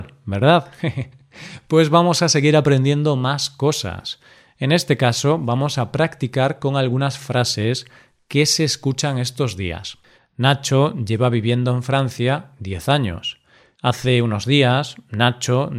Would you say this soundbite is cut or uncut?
cut